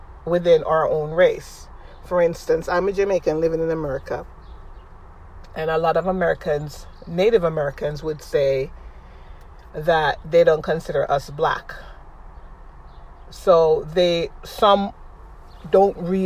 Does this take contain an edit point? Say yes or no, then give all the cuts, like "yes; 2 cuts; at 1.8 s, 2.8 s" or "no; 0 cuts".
no; 0 cuts